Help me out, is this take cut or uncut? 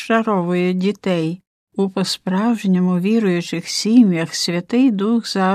uncut